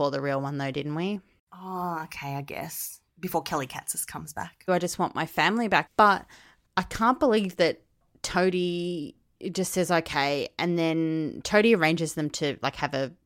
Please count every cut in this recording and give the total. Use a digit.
2